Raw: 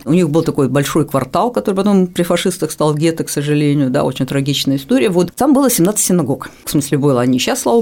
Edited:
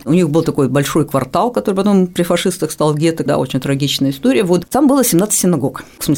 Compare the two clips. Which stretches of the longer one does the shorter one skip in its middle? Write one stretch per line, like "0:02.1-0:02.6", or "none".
0:03.3-0:03.9